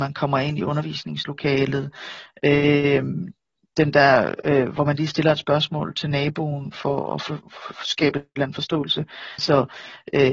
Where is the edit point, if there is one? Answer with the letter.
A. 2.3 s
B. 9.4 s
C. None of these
B